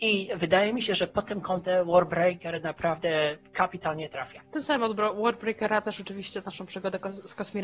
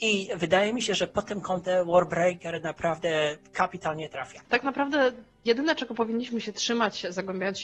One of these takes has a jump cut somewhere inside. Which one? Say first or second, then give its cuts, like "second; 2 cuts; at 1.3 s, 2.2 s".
second; 1 cut; at 4.4 s